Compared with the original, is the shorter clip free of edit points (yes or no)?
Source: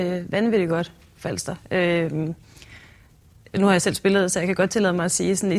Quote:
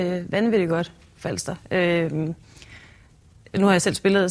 yes